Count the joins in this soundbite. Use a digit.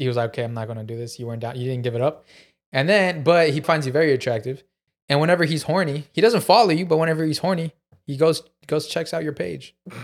1